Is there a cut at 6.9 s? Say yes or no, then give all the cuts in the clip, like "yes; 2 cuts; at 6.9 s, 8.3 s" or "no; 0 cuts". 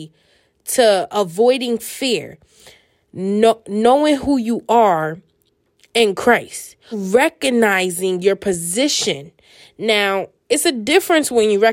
yes; 1 cut; at 6.9 s